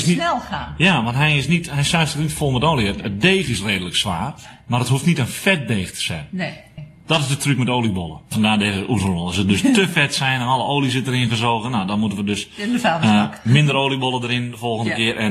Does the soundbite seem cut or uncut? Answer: uncut